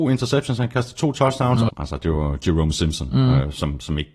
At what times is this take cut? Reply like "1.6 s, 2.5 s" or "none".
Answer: 1.7 s